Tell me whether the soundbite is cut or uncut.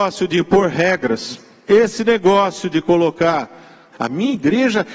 cut